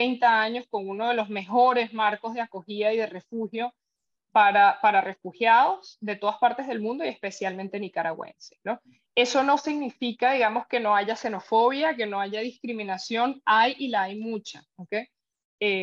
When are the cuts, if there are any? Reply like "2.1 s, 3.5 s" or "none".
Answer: none